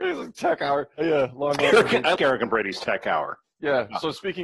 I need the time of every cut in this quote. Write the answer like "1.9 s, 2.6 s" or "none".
1.0 s, 2.1 s